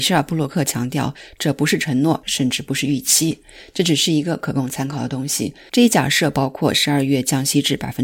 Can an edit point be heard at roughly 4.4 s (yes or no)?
no